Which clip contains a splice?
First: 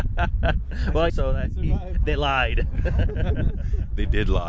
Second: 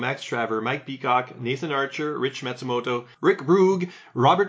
first; 1 cut; at 1.1 s

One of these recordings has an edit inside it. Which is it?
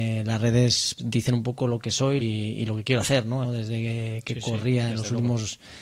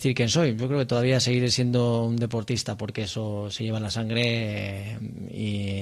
first; 3 cuts; at 1.0 s, 2.2 s, 3.4 s

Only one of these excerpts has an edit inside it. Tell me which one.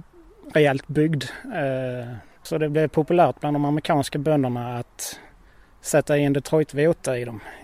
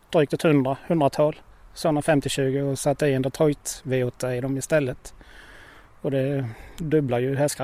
first; 1 cut; at 2.4 s

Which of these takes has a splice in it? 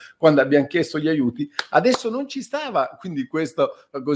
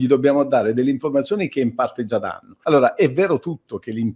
second; 1 cut; at 2.6 s

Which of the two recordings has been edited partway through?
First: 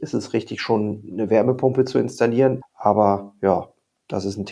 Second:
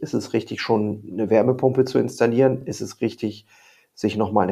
first; 1 cut; at 2.6 s

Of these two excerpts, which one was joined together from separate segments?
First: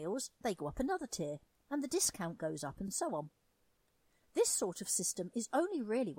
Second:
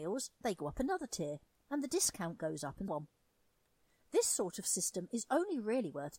second; 1 cut; at 2.9 s

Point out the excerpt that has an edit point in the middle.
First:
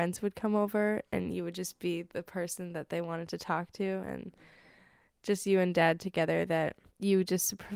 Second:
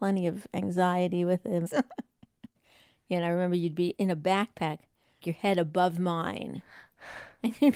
second; 2 cuts; at 1.7 s, 5.2 s

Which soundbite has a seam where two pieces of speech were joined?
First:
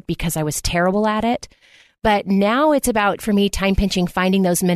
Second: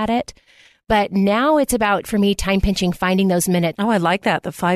second; 1 cut; at 3.7 s

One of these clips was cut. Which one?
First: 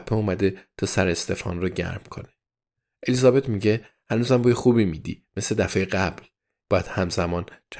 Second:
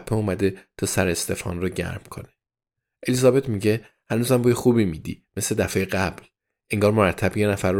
first; 1 cut; at 6.6 s

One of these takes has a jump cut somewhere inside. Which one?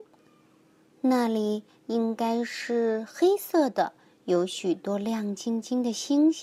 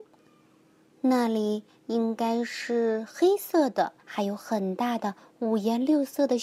second; 1 cut; at 4.0 s

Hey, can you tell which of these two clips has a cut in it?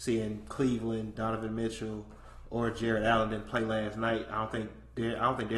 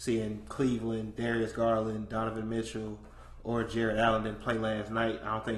first; 1 cut; at 1.2 s

